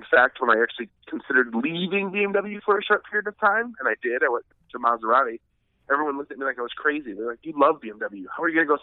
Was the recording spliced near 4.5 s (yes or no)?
yes